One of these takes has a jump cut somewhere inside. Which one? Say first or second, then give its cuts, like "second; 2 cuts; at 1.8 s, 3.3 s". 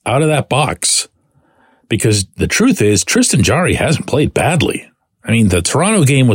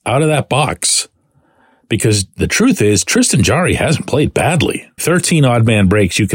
second; 1 cut; at 5.0 s